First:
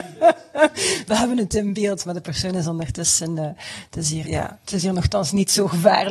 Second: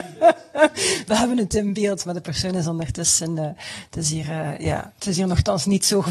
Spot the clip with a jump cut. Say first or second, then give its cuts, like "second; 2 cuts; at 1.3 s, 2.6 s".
first; 1 cut; at 4.2 s